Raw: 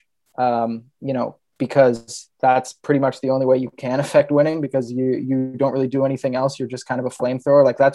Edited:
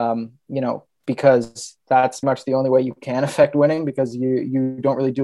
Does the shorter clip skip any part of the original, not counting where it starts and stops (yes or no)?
yes